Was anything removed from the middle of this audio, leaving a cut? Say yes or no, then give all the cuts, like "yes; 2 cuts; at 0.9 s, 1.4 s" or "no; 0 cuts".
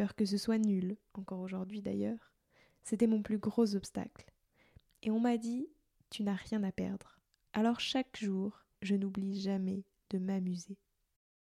yes; 2 cuts; at 7.4 s, 8.7 s